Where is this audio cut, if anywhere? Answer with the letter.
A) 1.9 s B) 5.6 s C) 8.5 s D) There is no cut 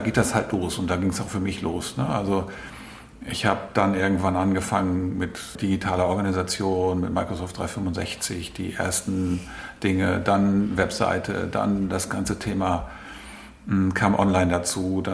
B